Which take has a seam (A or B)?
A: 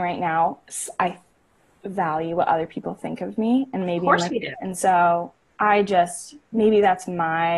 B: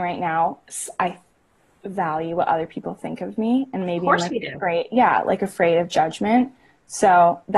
A